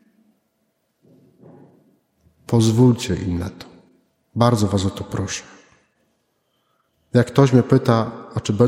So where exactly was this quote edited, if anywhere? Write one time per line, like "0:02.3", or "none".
none